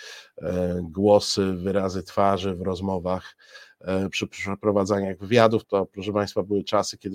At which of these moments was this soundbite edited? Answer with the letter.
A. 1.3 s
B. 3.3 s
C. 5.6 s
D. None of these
C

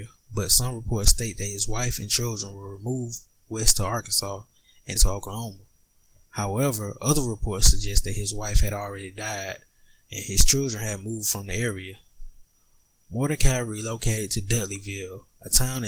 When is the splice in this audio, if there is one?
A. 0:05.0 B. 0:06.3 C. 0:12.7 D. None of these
A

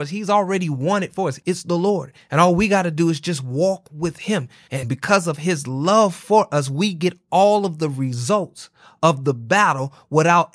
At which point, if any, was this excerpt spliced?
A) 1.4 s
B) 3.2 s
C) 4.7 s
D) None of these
A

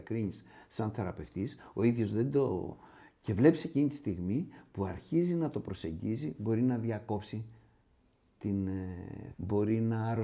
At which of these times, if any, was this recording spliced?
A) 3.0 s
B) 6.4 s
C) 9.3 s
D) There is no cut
C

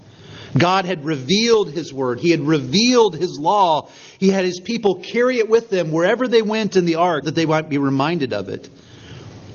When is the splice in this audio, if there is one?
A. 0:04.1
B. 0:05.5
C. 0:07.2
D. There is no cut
C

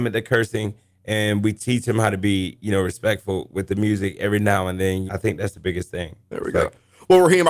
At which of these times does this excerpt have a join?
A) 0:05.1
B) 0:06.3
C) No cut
A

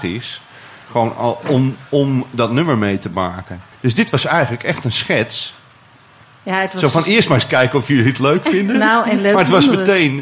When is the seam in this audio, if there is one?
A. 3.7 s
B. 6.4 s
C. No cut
A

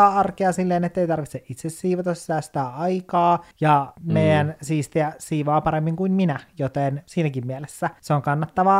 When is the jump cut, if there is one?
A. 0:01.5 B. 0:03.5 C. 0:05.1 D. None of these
B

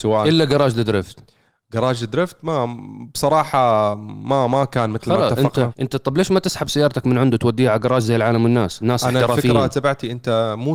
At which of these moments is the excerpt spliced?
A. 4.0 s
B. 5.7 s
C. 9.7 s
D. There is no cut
B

